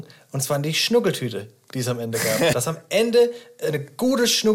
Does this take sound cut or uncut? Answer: cut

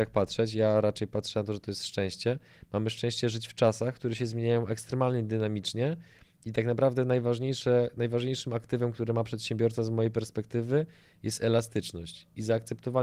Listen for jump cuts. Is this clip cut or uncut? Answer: uncut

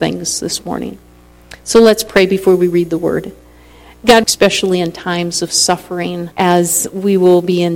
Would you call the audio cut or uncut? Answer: cut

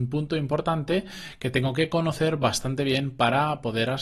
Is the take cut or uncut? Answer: uncut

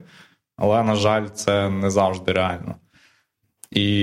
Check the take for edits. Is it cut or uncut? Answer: uncut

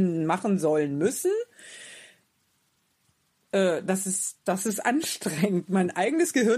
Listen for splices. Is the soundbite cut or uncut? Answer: cut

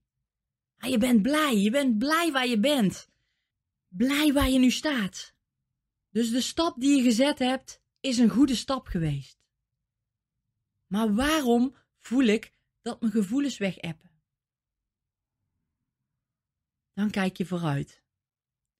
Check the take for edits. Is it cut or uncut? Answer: uncut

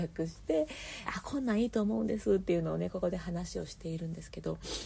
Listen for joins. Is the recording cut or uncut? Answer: cut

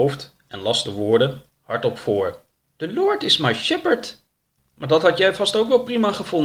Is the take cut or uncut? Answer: cut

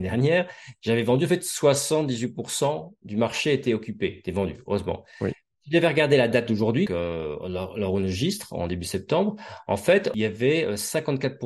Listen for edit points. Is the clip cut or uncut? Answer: cut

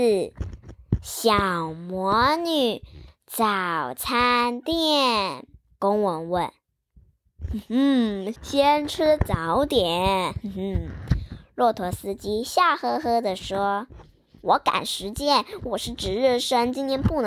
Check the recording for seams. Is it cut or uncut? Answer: cut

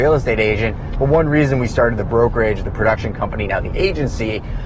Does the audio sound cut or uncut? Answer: uncut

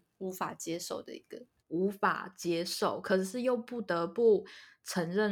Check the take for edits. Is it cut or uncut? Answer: cut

